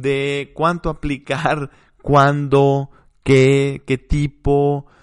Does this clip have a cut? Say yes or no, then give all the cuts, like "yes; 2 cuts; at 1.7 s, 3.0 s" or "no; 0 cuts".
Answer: no; 0 cuts